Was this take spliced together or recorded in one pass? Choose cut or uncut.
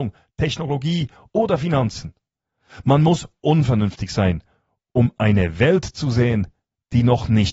uncut